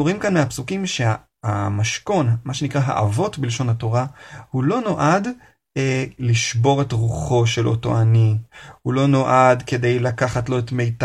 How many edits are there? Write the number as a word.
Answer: one